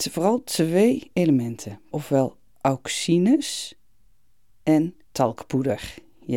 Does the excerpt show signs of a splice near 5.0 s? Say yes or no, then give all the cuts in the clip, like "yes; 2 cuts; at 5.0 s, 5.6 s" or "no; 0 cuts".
yes; 2 cuts; at 1.9 s, 5.0 s